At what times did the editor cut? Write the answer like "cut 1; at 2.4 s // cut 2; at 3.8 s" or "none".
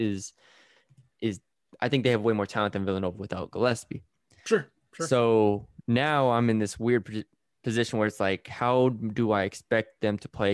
none

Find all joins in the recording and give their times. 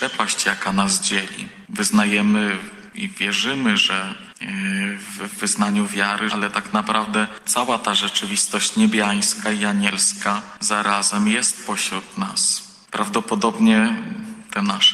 cut 1; at 6.3 s

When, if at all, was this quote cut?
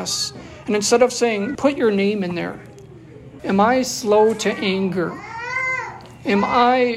cut 1; at 1.6 s // cut 2; at 3.4 s

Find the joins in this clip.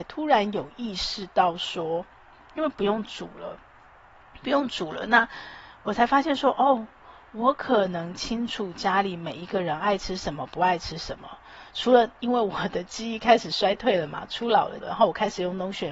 cut 1; at 14.8 s

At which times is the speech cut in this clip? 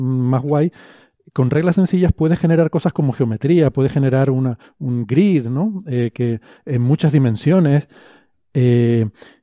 none

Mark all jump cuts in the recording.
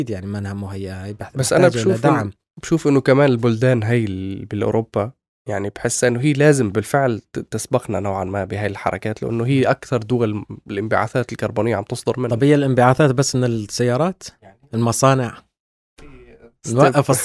cut 1; at 7.5 s

